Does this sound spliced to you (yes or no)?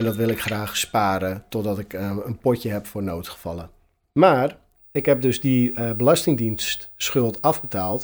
no